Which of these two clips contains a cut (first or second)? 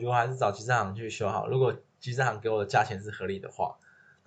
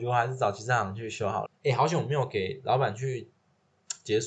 second